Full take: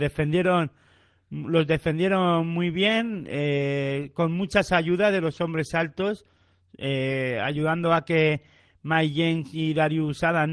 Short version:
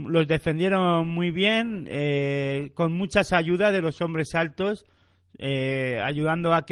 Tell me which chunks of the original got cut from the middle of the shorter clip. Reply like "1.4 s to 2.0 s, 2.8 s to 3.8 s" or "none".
none